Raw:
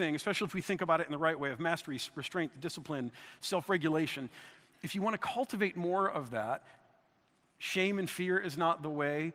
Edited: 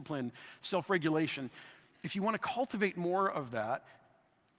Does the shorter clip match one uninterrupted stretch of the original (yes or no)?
yes